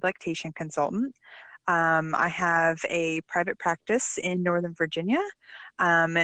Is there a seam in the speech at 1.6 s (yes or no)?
no